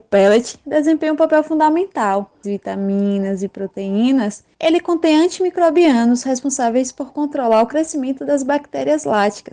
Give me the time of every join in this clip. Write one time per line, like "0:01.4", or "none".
0:02.4
0:04.5